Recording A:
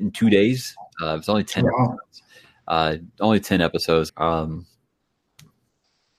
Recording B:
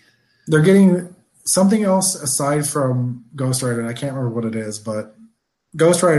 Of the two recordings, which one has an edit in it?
A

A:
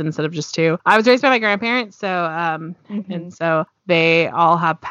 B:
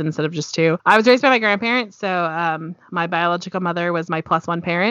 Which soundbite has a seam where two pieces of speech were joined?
A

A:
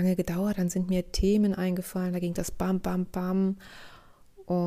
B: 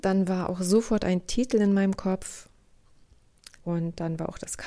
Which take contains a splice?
B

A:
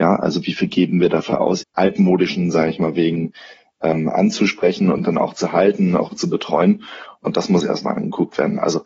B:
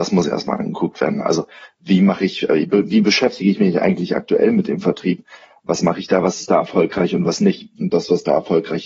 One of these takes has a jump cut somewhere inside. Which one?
A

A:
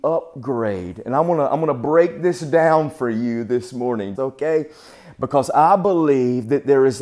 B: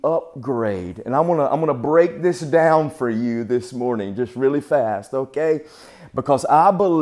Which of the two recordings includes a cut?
A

